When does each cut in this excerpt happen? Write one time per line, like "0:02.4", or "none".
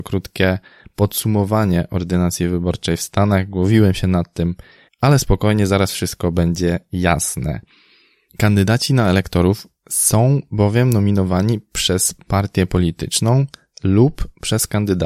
0:04.9
0:08.3